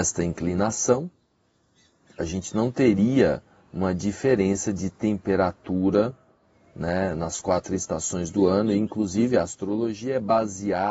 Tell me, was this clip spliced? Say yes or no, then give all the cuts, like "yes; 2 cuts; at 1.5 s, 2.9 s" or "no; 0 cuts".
no; 0 cuts